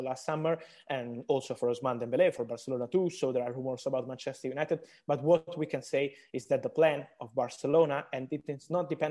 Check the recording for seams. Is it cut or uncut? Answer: cut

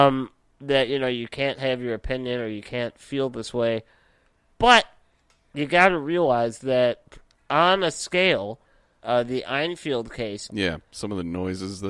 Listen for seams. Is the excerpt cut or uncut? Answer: cut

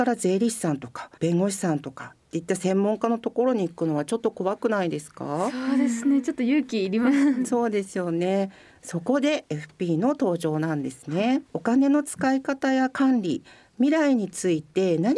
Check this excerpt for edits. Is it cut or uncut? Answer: cut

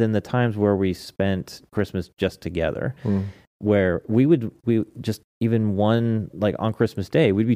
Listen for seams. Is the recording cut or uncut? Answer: cut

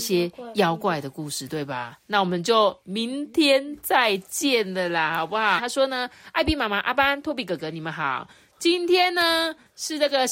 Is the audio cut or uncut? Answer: cut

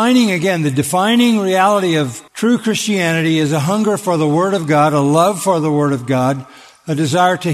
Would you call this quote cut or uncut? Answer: cut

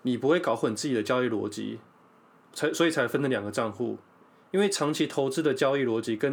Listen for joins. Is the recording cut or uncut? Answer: uncut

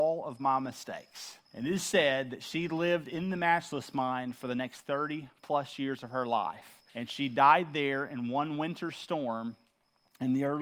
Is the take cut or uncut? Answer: cut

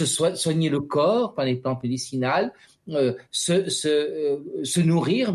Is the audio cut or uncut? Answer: uncut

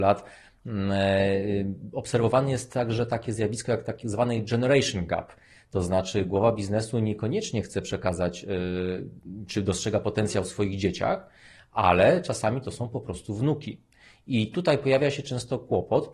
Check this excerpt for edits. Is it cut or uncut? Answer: uncut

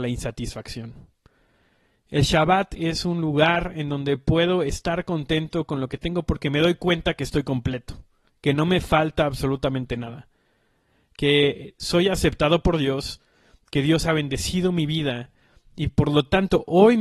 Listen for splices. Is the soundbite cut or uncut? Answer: uncut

